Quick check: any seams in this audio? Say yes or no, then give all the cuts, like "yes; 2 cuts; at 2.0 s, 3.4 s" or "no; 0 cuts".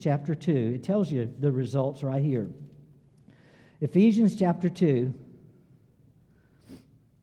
no; 0 cuts